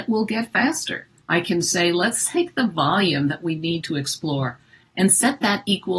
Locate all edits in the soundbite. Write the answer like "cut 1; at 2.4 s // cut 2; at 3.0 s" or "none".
cut 1; at 1.2 s